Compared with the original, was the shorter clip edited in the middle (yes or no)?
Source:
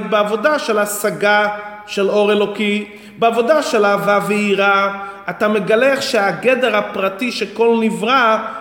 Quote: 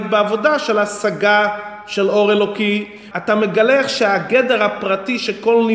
yes